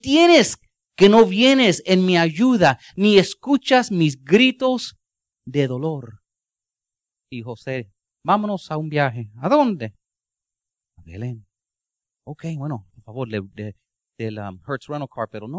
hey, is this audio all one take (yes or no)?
no